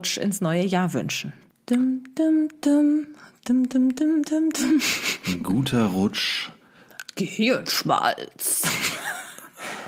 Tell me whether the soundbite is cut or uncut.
cut